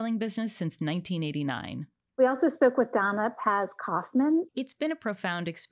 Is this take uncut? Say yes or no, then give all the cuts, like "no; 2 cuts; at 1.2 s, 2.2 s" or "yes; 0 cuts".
no; 1 cut; at 4.5 s